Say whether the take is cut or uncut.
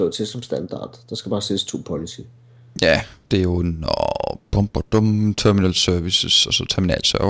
uncut